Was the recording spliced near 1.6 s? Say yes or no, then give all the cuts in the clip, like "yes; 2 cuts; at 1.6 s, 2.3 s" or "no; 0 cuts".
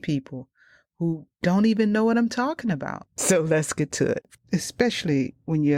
no; 2 cuts; at 3.1 s, 4.4 s